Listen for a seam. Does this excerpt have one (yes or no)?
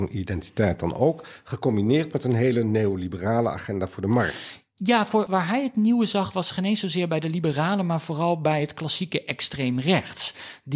yes